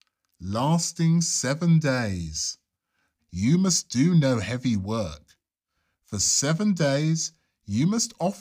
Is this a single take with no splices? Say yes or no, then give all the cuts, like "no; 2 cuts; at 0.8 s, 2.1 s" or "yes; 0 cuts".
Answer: no; 1 cut; at 3.2 s